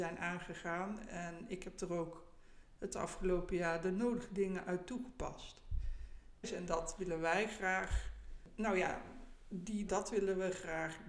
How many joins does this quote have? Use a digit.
2